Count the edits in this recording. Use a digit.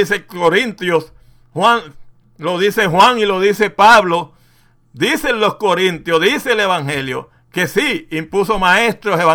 0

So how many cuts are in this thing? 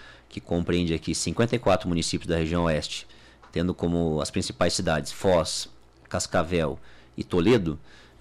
0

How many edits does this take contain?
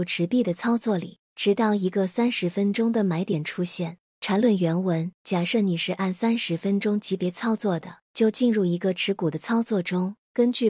3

